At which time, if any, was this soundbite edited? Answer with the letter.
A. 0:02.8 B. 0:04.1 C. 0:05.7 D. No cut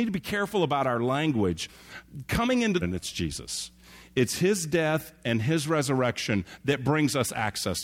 A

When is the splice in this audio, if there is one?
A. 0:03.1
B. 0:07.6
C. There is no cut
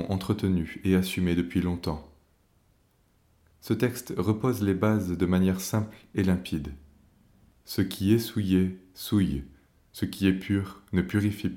C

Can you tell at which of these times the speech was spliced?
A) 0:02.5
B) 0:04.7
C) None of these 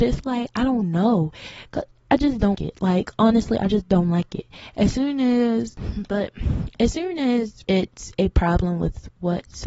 A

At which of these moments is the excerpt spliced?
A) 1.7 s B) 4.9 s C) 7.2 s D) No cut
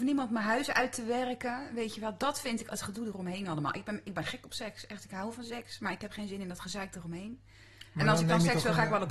D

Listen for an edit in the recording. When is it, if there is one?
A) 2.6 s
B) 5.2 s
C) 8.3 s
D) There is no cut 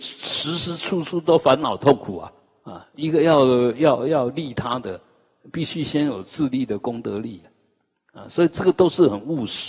A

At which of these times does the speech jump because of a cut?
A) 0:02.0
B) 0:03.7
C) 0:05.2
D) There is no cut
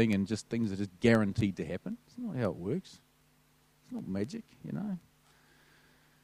A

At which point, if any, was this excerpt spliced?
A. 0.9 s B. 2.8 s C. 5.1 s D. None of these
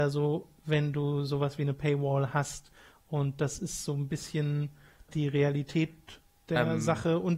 C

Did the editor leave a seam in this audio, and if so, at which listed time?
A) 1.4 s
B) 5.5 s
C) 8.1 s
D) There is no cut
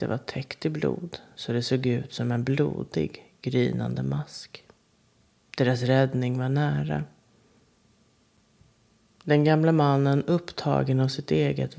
B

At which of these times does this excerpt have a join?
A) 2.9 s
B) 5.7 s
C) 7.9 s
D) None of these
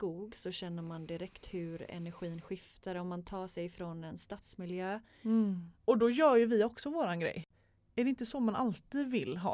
B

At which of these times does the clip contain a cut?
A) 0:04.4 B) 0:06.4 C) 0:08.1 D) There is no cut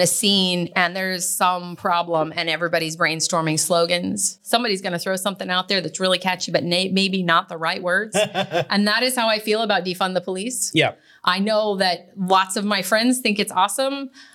D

